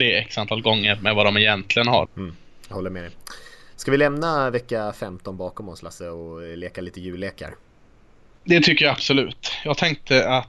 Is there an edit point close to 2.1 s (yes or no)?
yes